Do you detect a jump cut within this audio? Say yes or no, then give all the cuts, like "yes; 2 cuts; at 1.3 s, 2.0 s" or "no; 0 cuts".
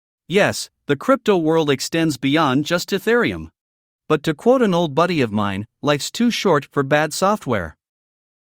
yes; 1 cut; at 4.0 s